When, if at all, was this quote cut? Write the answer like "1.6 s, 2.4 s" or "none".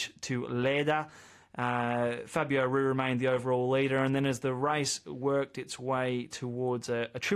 none

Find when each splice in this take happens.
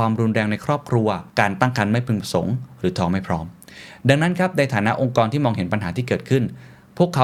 1.3 s

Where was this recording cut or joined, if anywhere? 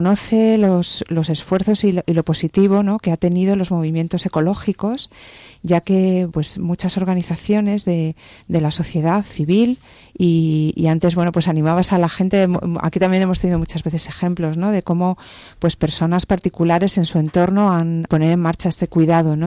6.3 s, 18.1 s

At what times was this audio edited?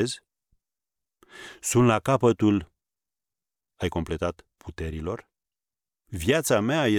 6.0 s

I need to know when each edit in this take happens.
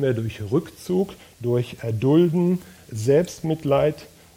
2.8 s

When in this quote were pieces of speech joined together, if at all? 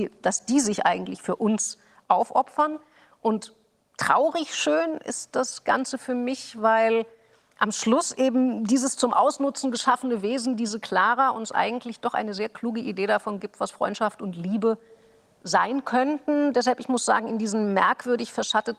none

